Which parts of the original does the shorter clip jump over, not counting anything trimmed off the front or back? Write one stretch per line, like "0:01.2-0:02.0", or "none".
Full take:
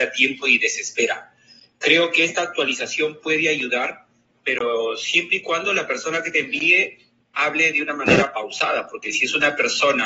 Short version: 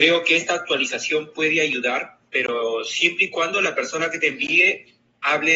0:04.1-0:04.4